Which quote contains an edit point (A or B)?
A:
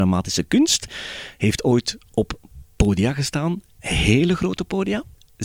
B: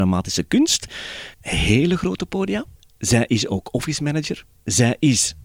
B